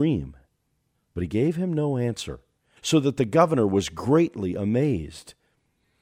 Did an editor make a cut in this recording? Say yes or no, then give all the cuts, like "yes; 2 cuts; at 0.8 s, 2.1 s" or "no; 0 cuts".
yes; 2 cuts; at 0.9 s, 2.8 s